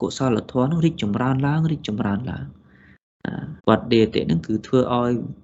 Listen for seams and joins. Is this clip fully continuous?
no; 1 cut; at 3.6 s

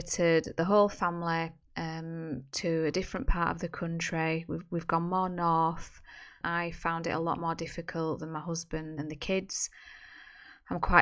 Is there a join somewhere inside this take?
yes; 2 cuts; at 6.4 s, 9.0 s

